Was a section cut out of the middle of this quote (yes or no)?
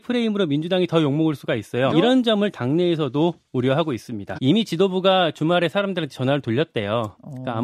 yes